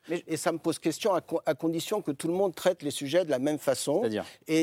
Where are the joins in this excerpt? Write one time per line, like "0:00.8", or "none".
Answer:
none